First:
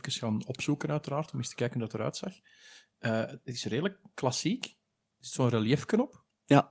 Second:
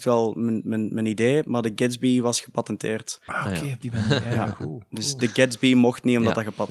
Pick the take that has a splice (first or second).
second